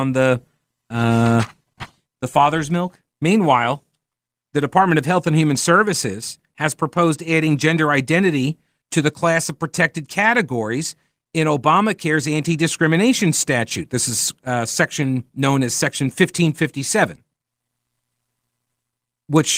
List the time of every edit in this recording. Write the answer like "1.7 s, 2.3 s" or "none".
3.1 s